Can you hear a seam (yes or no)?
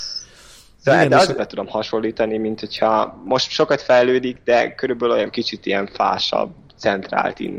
yes